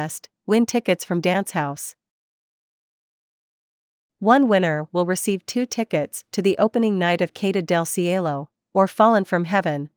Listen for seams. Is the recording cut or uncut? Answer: uncut